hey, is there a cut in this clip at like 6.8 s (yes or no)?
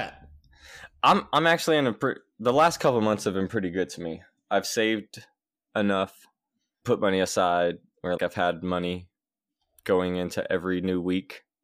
yes